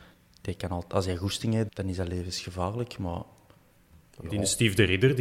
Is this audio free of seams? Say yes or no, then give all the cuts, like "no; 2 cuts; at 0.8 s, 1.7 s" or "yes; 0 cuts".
no; 1 cut; at 1.7 s